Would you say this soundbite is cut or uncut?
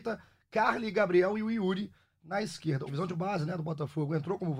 cut